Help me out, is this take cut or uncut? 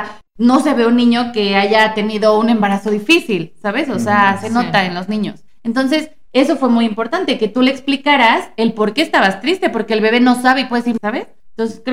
cut